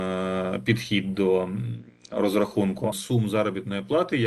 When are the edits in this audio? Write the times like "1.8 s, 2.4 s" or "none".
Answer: 2.9 s